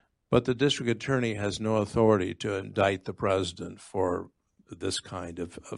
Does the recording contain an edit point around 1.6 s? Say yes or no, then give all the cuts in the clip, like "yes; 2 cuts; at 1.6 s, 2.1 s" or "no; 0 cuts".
no; 0 cuts